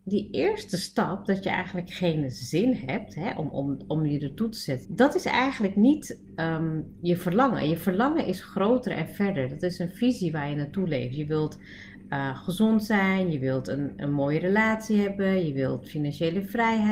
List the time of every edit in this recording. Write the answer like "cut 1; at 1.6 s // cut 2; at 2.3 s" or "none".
cut 1; at 4.9 s